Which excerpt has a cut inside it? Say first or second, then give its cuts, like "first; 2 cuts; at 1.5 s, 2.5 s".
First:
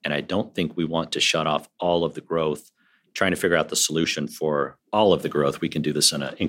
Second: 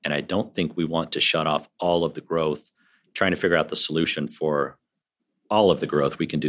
first; 1 cut; at 4.8 s